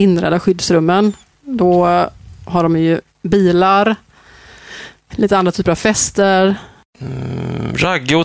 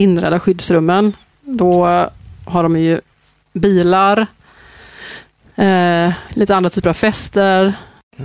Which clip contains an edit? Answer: first; 2 cuts; at 3.1 s, 5.1 s

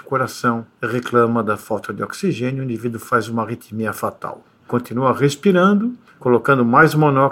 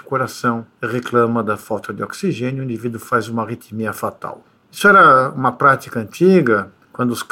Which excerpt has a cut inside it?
first; 1 cut; at 4.6 s

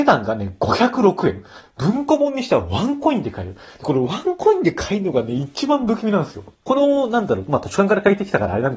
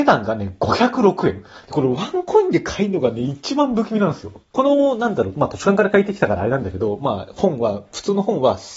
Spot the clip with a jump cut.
second; 1 cut; at 1.6 s

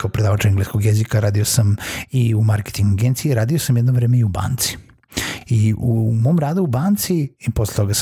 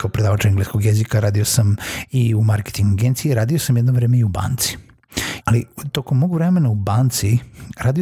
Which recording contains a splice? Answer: second; 1 cut; at 5.4 s

